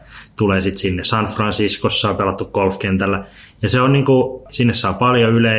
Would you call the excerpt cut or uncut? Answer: cut